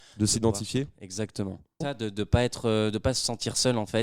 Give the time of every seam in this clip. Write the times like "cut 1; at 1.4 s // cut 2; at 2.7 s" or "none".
cut 1; at 1.8 s